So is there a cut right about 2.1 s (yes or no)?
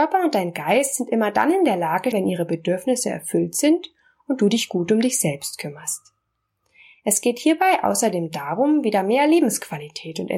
yes